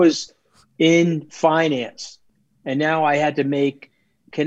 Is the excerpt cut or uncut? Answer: uncut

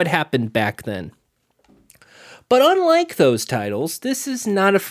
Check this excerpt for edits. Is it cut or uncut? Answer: uncut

